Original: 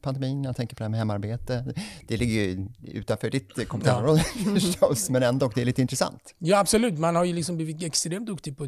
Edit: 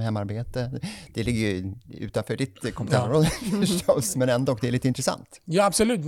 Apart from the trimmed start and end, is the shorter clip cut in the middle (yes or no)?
no